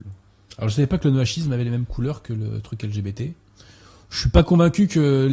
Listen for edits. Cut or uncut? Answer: uncut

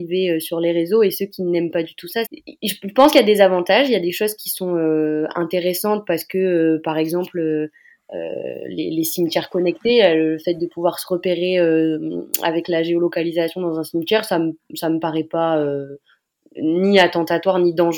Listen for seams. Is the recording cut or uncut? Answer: cut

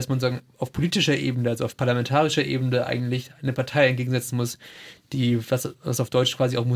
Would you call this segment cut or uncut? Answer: uncut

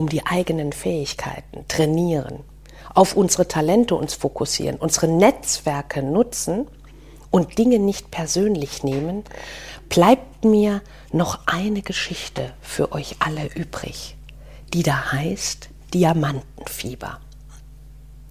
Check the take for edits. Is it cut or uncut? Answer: uncut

